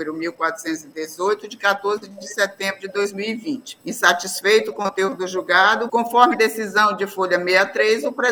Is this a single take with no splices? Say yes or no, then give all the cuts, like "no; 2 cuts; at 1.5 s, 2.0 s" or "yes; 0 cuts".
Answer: no; 2 cuts; at 3.8 s, 5.9 s